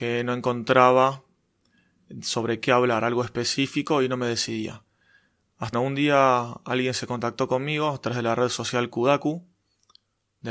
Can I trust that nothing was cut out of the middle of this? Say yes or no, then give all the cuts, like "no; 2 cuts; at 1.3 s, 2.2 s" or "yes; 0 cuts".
no; 1 cut; at 5.7 s